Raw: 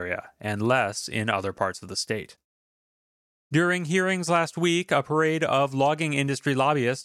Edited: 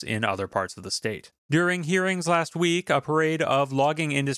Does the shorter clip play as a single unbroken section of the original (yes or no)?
no